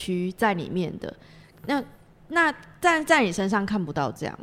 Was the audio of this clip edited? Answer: no; 0 cuts

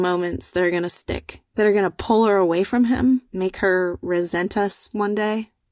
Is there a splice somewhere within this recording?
yes; 2 cuts; at 1.5 s, 3.2 s

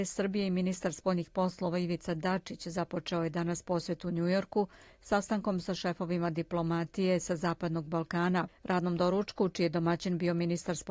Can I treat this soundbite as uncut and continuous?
no; 1 cut; at 8.5 s

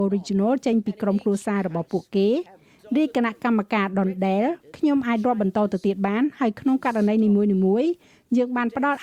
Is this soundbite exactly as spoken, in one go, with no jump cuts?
yes; 0 cuts

